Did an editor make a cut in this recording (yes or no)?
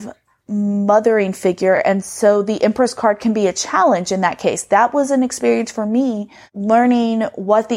no